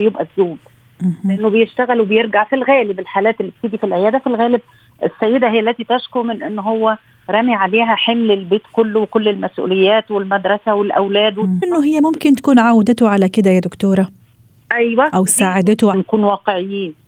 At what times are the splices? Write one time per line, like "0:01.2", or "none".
0:11.6
0:15.9